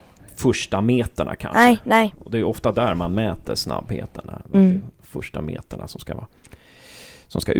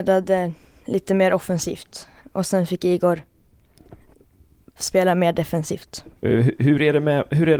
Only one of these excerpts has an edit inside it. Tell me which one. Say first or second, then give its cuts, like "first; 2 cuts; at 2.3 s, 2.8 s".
second; 1 cut; at 6.2 s